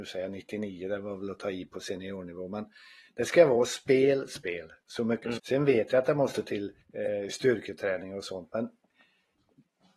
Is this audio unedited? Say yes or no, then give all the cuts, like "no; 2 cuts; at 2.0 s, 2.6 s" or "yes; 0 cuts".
no; 3 cuts; at 4.3 s, 5.4 s, 6.8 s